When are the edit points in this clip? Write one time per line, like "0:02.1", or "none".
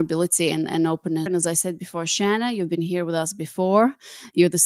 0:01.3

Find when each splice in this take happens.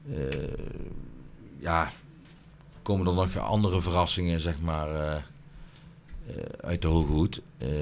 none

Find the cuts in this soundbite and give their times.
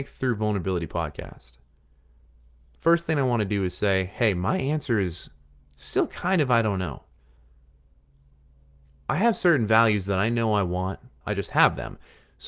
0:11.2

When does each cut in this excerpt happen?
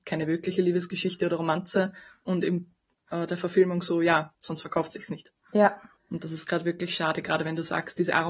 0:04.3

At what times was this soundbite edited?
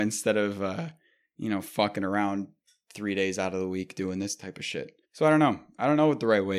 0:05.0

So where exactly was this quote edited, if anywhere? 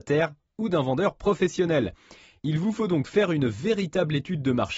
none

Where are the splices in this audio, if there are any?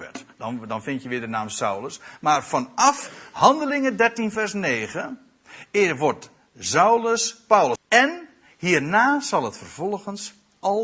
0:07.8

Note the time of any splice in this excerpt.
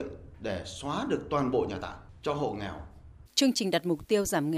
0:03.3

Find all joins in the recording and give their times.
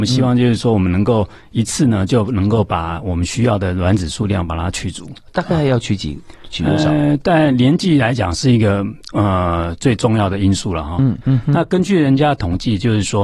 0:11.2

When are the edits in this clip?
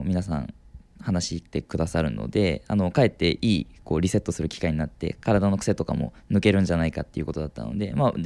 0:01.5

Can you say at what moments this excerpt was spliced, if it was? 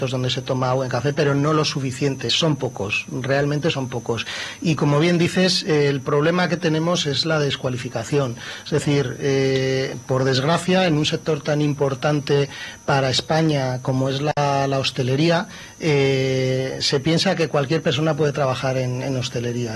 none

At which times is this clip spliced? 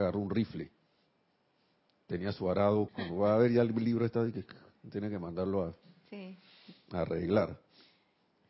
0:02.9

